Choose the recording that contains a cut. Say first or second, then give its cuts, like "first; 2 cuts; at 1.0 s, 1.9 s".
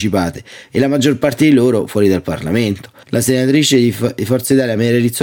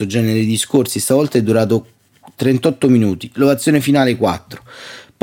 first; 1 cut; at 3.0 s